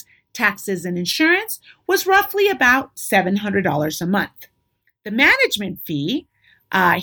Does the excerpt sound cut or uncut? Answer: uncut